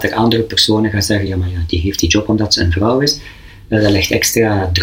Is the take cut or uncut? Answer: uncut